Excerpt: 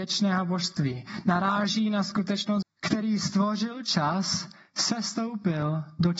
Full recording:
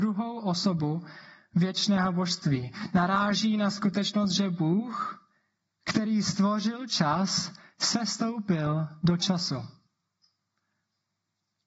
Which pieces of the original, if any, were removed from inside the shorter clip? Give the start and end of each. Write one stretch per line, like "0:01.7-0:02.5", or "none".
0:04.3-0:05.7